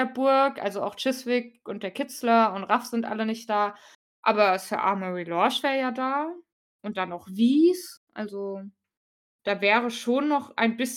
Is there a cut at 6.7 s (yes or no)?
no